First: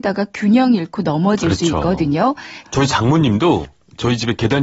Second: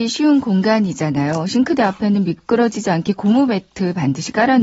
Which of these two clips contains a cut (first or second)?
first